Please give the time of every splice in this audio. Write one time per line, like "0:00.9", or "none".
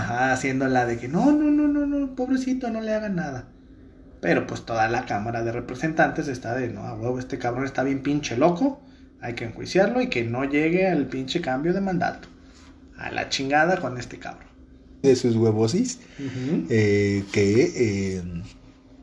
0:15.0

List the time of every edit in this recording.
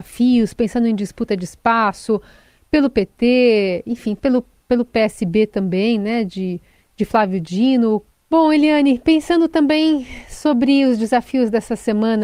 0:08.1

